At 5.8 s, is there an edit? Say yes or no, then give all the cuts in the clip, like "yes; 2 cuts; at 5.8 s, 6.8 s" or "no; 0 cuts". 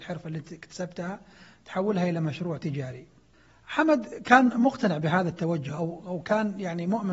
no; 0 cuts